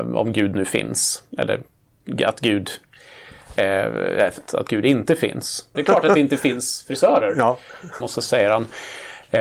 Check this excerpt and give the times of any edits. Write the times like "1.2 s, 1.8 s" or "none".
4.5 s, 5.7 s, 8.0 s